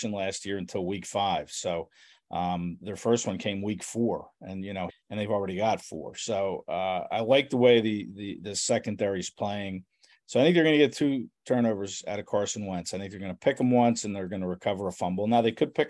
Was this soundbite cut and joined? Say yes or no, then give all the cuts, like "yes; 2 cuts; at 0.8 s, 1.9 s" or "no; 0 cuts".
yes; 1 cut; at 4.9 s